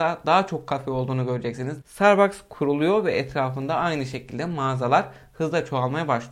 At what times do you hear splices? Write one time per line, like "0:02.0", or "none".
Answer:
0:01.8